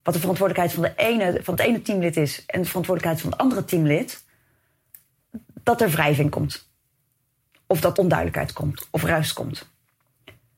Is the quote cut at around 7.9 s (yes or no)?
yes